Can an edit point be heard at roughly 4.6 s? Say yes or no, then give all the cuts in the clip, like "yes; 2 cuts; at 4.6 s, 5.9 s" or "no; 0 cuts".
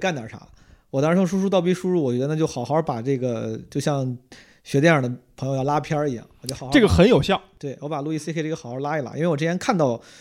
no; 0 cuts